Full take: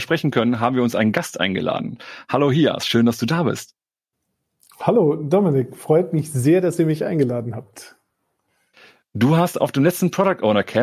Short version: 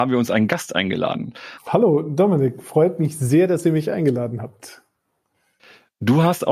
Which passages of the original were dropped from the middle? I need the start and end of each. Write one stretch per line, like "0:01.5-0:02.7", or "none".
0:02.2-0:04.7